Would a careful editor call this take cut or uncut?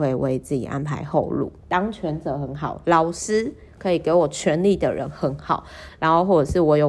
cut